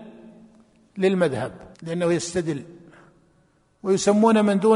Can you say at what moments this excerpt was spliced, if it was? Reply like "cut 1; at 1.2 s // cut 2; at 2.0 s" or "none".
cut 1; at 1.7 s